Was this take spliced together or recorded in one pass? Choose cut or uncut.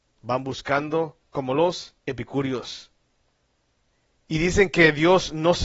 cut